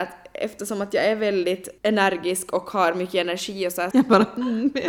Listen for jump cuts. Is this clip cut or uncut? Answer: cut